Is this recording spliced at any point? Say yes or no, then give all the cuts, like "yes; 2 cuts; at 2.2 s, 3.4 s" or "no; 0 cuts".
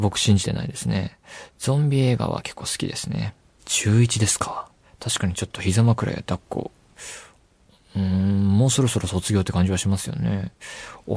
yes; 1 cut; at 3.6 s